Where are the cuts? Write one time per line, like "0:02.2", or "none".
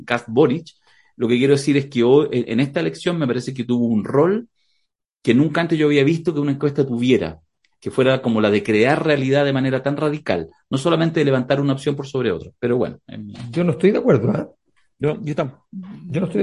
none